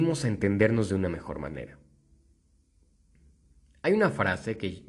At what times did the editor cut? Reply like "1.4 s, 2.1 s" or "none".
none